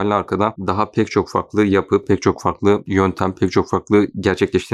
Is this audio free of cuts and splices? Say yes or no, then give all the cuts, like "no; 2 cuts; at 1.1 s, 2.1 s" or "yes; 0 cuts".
yes; 0 cuts